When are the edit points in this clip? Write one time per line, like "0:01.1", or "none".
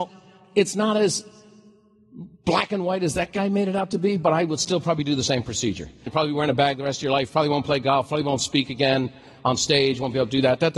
0:06.1